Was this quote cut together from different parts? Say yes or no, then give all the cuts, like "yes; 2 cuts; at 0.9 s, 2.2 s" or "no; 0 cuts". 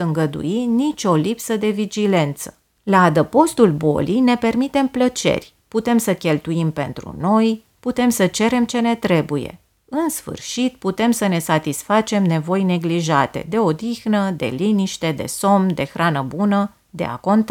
yes; 1 cut; at 2.8 s